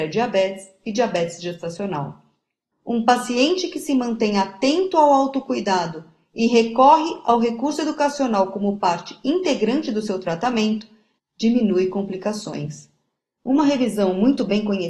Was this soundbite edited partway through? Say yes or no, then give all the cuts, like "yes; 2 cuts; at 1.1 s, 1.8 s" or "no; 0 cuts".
yes; 3 cuts; at 2.7 s, 11.2 s, 13.4 s